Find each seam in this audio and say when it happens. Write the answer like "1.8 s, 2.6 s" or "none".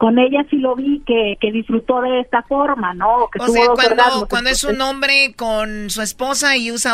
none